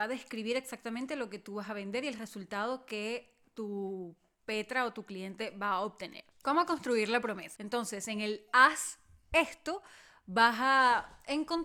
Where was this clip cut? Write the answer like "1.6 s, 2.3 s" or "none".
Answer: 6.3 s, 7.5 s